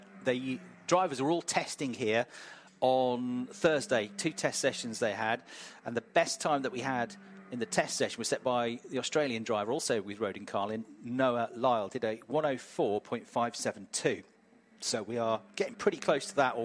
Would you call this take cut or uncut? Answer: uncut